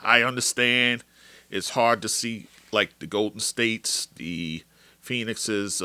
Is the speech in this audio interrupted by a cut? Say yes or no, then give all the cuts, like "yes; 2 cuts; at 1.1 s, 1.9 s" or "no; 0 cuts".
no; 0 cuts